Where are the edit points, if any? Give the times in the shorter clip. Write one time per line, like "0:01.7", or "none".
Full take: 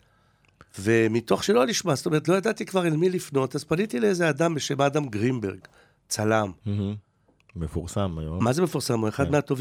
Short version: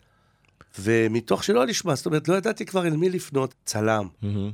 0:03.5